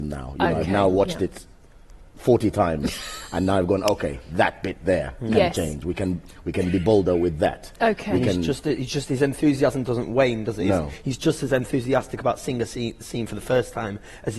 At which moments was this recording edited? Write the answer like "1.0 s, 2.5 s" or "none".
none

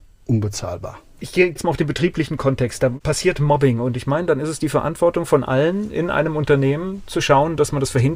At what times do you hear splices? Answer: none

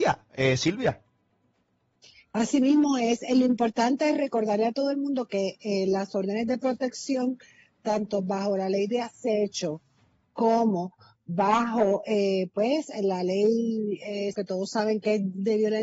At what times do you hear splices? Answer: 14.3 s

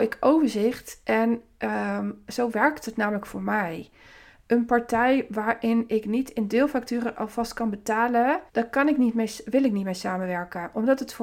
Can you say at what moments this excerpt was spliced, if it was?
8.5 s

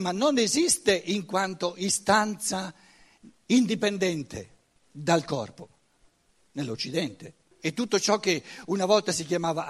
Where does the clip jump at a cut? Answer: 7.5 s

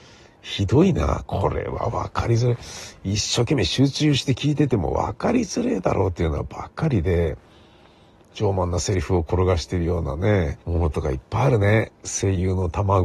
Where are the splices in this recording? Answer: 10.6 s

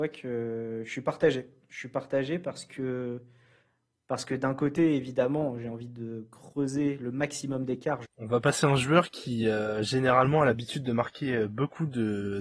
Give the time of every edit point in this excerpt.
8.0 s

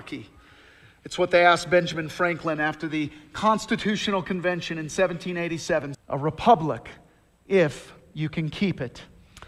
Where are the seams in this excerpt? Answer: 5.9 s

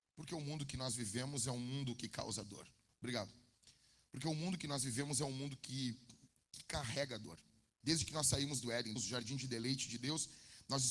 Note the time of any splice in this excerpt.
7.8 s, 9.0 s

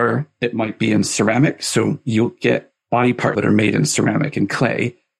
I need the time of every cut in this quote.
3.3 s

